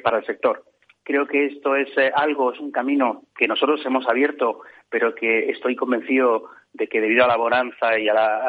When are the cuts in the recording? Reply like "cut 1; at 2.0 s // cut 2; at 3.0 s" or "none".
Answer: cut 1; at 3.3 s